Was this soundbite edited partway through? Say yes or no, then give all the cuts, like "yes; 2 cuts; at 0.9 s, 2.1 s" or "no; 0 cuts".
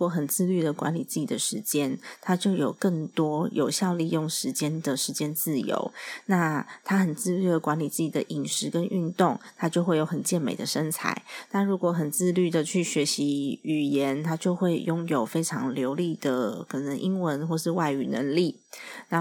no; 0 cuts